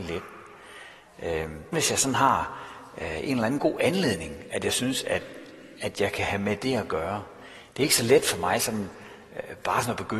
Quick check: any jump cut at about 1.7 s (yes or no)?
yes